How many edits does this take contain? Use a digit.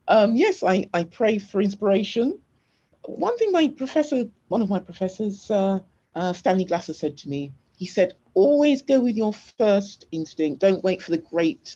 0